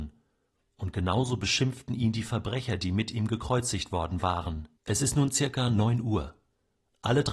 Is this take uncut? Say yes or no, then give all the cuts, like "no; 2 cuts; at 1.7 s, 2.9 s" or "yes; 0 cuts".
no; 1 cut; at 4.8 s